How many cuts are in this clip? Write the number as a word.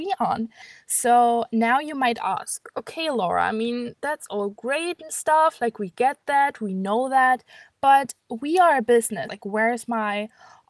one